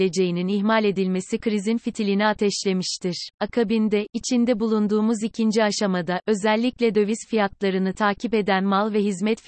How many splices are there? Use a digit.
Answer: 1